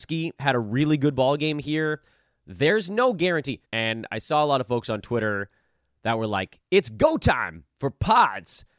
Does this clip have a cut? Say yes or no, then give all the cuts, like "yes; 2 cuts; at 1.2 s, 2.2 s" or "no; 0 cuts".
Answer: yes; 1 cut; at 3.6 s